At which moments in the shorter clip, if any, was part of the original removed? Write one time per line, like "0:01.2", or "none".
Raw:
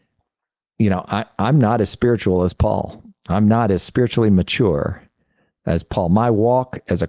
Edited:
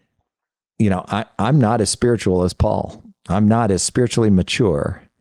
none